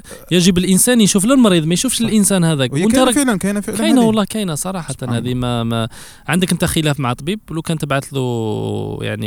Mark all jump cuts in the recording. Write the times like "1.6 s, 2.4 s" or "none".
none